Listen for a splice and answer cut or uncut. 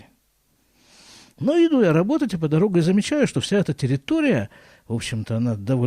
uncut